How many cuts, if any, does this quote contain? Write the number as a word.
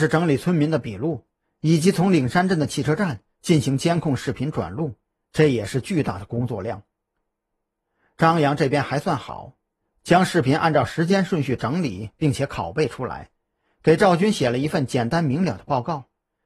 zero